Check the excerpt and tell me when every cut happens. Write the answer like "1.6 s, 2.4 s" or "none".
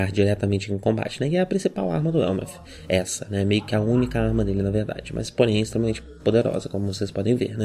none